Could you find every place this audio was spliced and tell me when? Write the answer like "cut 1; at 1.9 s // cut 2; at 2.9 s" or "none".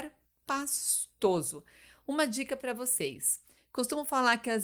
cut 1; at 3.6 s